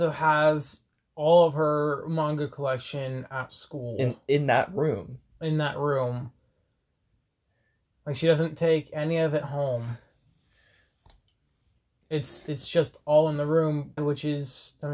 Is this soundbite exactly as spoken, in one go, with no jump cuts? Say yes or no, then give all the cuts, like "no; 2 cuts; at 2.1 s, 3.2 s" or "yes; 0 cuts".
no; 1 cut; at 14.0 s